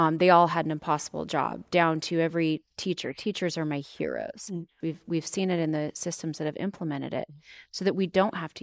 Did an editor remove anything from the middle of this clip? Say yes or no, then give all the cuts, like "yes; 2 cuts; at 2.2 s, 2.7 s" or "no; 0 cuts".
yes; 1 cut; at 4.8 s